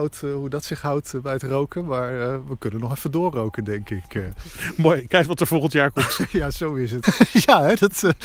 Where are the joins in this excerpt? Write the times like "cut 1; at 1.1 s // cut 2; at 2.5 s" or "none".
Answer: cut 1; at 5.1 s // cut 2; at 7.0 s